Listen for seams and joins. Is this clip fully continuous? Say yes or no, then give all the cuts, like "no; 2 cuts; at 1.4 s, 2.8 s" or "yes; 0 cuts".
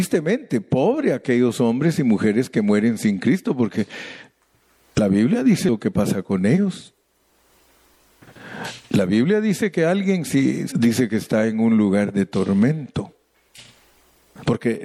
no; 1 cut; at 10.7 s